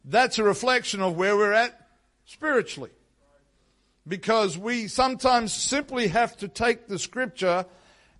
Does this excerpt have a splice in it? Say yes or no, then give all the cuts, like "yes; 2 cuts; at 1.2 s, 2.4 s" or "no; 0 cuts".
no; 0 cuts